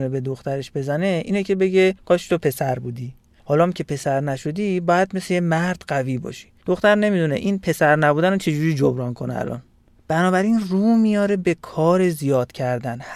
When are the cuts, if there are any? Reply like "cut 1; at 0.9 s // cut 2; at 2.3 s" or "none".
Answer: none